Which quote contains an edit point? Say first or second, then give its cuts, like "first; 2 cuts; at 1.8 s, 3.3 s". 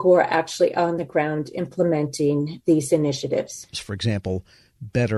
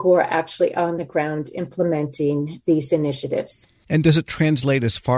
first; 1 cut; at 3.7 s